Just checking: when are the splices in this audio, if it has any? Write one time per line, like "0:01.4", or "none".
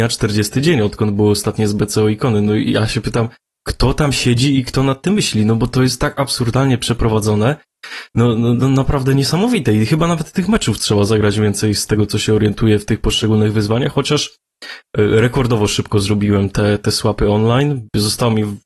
none